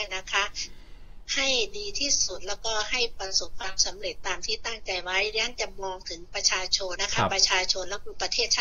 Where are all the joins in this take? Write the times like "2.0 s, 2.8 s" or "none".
7.0 s